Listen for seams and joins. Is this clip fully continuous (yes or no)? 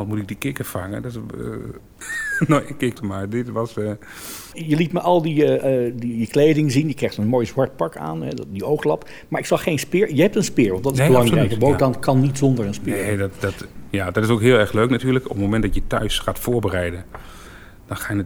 no